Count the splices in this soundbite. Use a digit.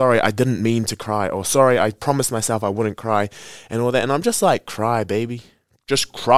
0